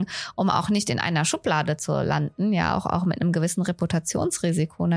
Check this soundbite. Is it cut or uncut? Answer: uncut